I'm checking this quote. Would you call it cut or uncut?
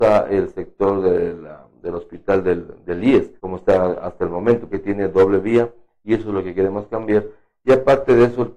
cut